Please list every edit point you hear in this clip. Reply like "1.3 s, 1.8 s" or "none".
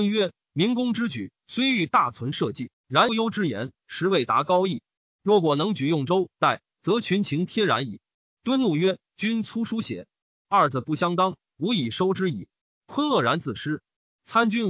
3.1 s